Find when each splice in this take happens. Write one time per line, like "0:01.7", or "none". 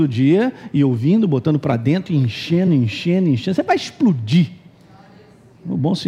none